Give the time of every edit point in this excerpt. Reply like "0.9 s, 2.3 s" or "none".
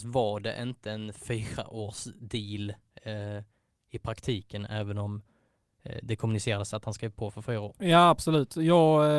7.7 s